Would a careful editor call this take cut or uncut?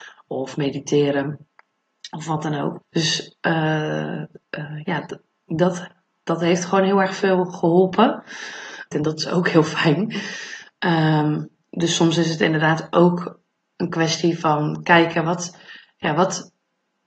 cut